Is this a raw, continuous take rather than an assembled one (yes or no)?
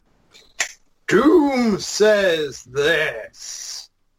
yes